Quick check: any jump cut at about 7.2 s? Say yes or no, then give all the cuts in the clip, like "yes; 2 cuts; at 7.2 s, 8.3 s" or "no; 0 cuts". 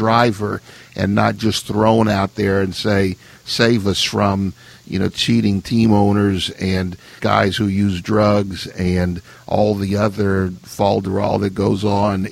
yes; 1 cut; at 7.2 s